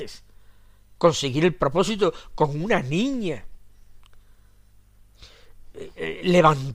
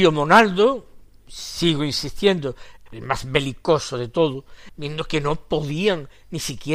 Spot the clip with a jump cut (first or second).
second